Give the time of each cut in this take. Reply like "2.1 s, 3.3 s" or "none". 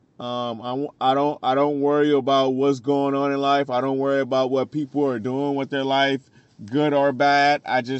none